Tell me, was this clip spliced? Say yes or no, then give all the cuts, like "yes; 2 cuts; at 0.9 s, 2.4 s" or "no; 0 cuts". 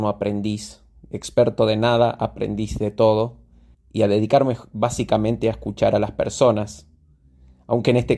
yes; 1 cut; at 3.7 s